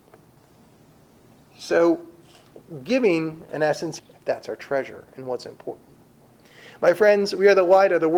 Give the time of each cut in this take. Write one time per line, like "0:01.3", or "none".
0:04.0